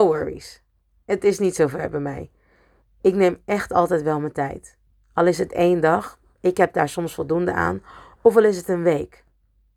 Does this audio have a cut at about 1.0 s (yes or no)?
no